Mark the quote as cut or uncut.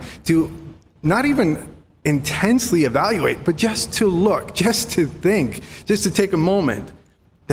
uncut